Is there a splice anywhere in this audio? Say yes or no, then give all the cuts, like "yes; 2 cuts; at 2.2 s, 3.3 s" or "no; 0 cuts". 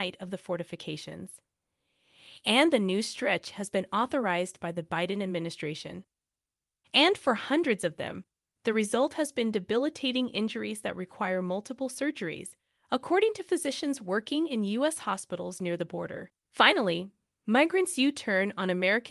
yes; 2 cuts; at 6.8 s, 16.4 s